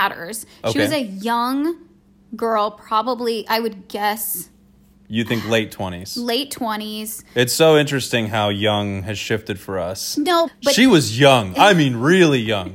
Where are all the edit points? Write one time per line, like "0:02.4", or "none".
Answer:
0:10.5